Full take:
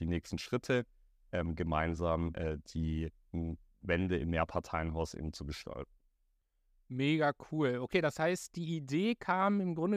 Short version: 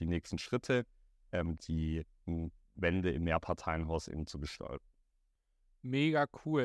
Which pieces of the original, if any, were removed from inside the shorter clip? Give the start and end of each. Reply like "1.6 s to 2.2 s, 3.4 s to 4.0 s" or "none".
1.6 s to 2.6 s